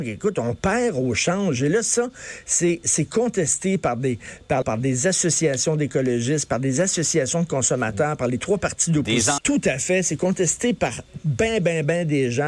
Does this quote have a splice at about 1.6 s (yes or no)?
no